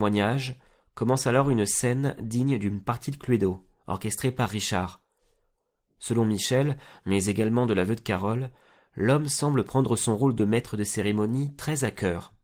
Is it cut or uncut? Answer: uncut